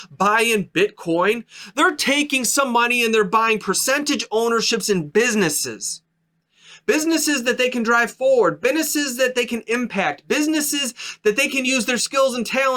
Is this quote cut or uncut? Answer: uncut